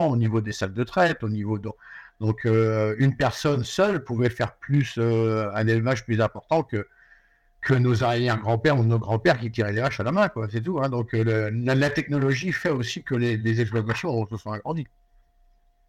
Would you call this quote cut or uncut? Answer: uncut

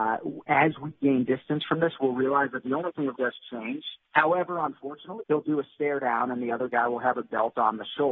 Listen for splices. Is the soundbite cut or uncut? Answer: cut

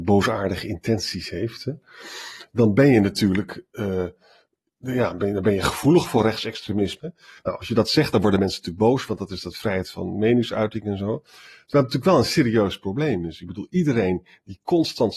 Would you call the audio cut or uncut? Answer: cut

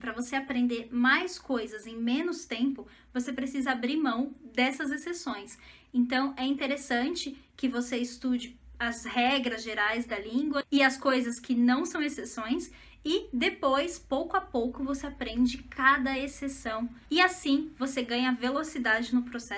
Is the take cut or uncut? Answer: cut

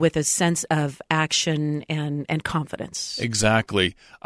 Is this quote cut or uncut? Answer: uncut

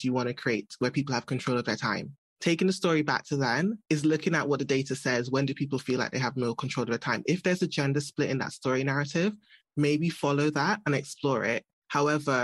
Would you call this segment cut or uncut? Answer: uncut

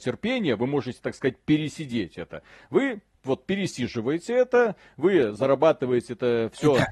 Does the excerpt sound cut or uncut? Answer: uncut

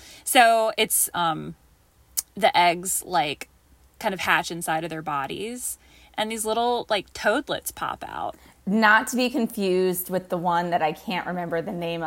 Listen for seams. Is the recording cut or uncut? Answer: cut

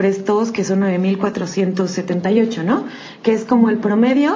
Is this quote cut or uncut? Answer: uncut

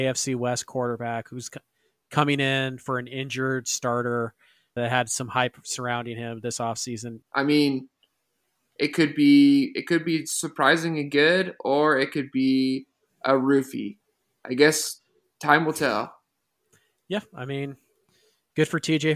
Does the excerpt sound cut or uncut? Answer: cut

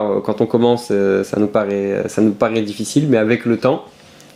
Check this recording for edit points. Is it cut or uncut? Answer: uncut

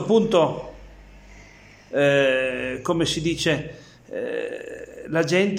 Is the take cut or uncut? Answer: uncut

